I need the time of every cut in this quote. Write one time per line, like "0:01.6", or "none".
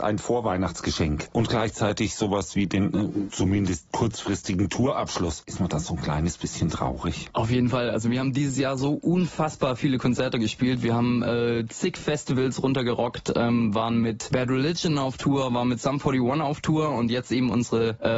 0:01.3